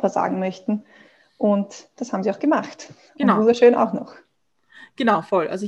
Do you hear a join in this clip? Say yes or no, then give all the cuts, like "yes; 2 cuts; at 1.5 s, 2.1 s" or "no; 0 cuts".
no; 0 cuts